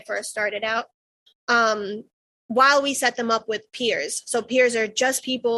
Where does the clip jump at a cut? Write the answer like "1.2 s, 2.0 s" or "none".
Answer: none